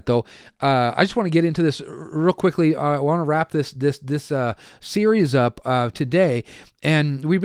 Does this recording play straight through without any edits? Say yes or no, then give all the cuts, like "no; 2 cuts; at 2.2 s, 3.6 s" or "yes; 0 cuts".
yes; 0 cuts